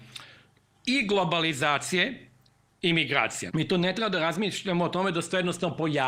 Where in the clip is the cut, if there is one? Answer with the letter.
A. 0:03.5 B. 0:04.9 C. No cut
A